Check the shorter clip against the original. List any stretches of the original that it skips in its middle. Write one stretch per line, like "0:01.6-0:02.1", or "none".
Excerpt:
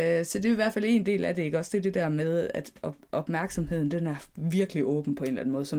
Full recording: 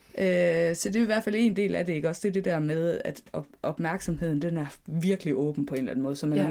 none